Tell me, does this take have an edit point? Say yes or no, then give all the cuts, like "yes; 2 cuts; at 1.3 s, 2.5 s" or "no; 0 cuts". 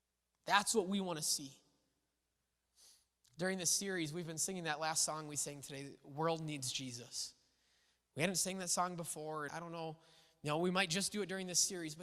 yes; 1 cut; at 9.5 s